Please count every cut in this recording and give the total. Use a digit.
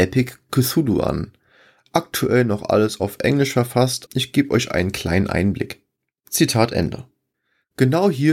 2